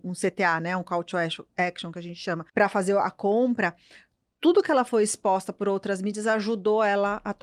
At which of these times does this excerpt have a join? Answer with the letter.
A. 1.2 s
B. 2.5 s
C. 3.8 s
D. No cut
B